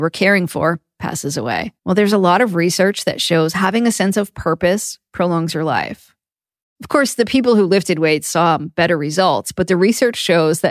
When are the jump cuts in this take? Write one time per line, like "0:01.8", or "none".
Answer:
0:01.8
0:06.6